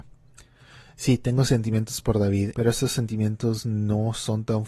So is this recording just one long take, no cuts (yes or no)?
no